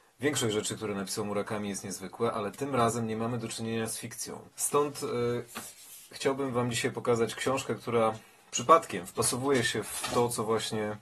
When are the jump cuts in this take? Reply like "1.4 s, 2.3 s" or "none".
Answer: 4.5 s